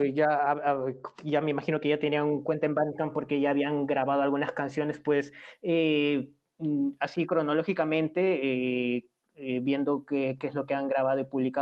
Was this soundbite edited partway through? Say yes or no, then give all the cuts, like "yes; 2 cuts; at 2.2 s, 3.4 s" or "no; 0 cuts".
no; 0 cuts